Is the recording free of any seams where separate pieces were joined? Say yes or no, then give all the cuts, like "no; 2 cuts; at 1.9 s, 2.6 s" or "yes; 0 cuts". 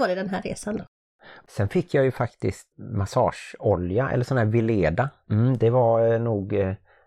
no; 2 cuts; at 2.7 s, 5.2 s